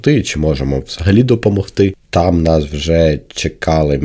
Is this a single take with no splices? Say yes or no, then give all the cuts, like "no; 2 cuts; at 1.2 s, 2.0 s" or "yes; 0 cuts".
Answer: no; 1 cut; at 2.0 s